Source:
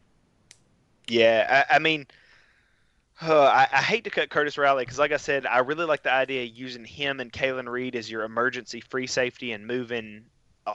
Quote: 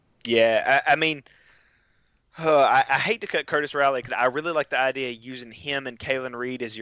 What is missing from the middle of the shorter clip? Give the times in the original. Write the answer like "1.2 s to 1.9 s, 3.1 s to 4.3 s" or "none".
4.9 s to 5.4 s